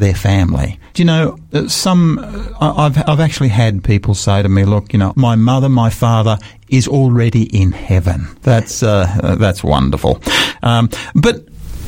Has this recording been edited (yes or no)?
yes